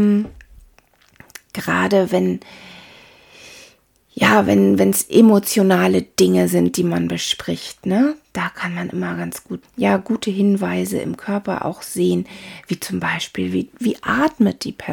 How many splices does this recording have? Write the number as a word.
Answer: one